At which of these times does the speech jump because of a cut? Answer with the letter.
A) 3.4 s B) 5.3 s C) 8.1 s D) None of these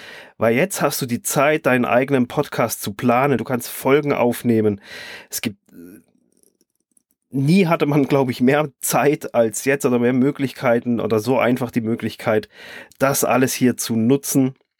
A